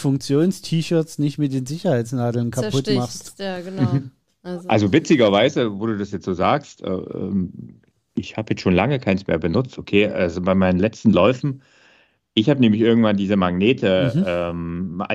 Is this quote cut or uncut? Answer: uncut